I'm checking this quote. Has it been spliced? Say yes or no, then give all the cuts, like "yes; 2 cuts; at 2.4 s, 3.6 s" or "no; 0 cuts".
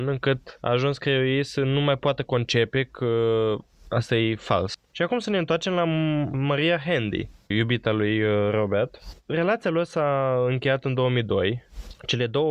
yes; 1 cut; at 7.5 s